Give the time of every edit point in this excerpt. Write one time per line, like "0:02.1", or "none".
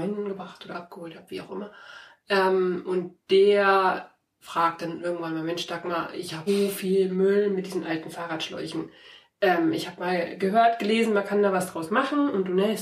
0:06.5